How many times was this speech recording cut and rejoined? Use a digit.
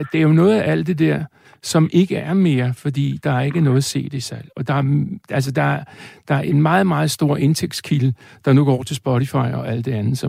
0